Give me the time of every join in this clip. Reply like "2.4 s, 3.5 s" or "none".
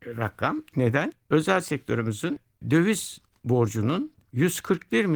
1.3 s